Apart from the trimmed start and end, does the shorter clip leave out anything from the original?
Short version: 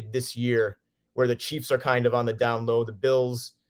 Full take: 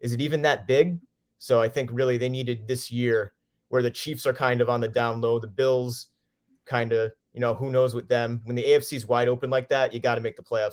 no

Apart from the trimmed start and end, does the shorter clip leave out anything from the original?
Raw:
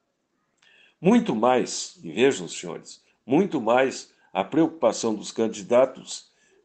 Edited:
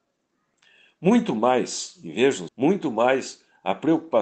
yes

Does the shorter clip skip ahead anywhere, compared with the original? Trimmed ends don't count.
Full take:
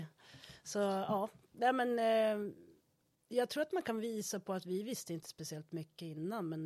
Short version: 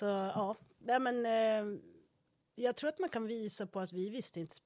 no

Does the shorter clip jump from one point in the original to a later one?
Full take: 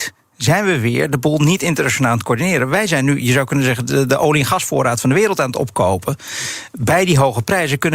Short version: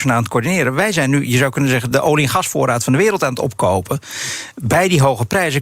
yes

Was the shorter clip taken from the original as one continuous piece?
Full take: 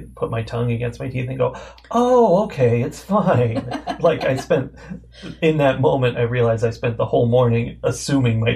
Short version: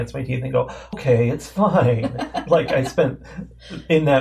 no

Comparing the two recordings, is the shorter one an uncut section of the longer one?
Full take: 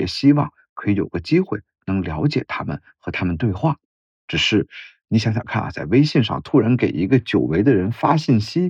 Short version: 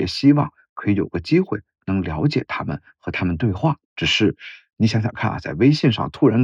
no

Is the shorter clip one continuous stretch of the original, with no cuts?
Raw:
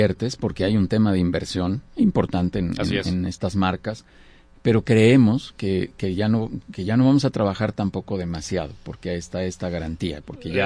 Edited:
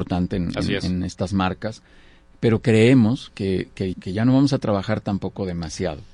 no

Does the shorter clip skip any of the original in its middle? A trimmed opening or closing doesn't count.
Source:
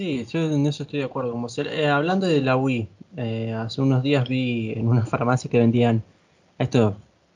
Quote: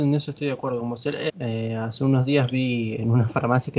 yes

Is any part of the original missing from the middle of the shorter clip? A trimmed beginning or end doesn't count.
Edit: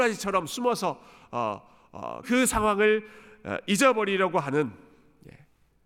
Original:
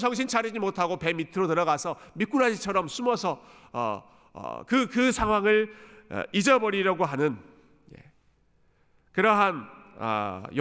yes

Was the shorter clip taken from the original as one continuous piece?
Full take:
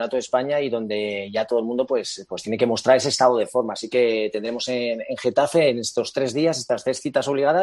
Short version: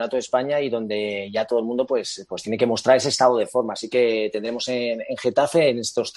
yes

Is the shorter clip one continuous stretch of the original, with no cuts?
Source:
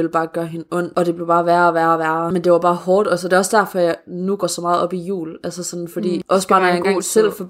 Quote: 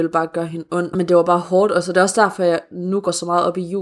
no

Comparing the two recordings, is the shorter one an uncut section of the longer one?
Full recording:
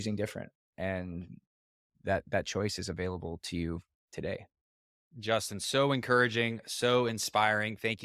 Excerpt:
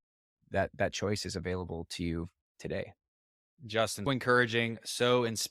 no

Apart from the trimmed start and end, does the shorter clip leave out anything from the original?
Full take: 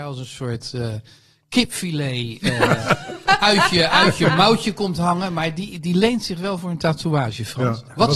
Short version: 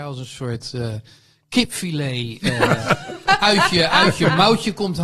no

